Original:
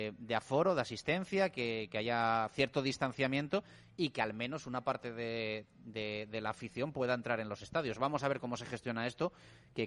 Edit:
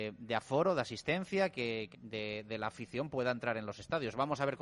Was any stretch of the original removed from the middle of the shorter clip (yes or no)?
yes